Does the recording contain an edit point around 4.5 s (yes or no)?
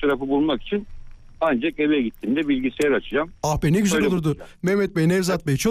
yes